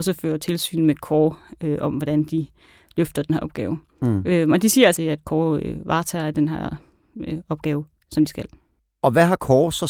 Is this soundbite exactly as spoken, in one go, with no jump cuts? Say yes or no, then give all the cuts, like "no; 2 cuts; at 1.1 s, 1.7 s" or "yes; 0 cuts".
no; 1 cut; at 5.0 s